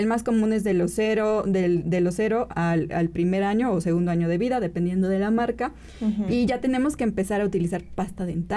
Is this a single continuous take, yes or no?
yes